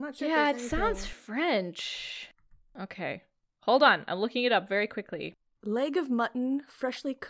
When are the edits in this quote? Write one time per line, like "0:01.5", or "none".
0:05.6